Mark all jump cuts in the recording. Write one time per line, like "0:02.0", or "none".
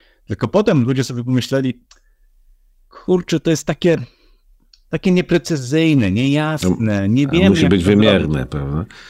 none